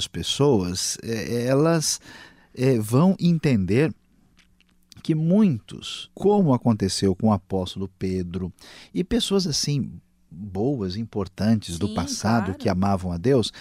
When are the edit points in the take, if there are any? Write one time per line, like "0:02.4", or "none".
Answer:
0:06.1